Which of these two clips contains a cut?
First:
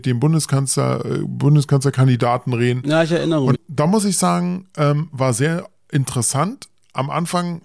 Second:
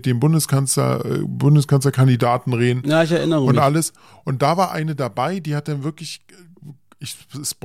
first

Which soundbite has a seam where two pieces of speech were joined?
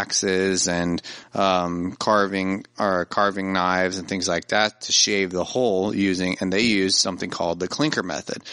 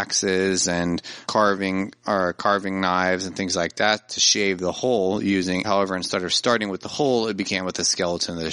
second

